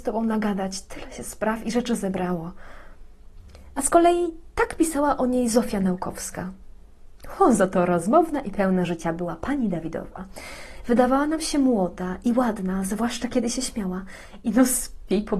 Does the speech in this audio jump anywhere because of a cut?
no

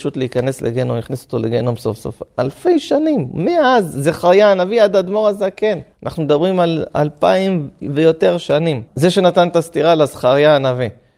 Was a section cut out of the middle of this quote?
yes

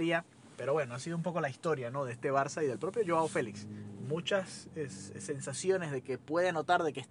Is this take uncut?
yes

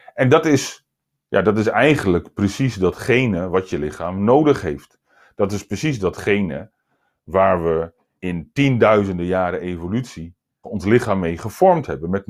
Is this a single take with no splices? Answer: no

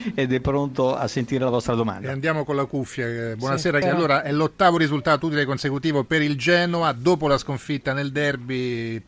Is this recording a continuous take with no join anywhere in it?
no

